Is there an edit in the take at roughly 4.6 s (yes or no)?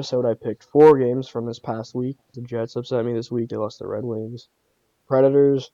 no